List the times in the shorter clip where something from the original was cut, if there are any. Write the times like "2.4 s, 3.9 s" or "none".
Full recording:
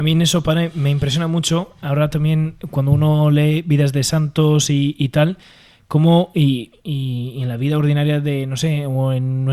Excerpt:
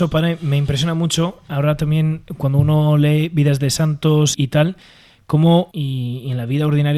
4.3 s, 5.7 s